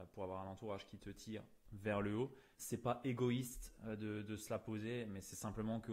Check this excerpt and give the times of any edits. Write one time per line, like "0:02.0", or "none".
0:02.5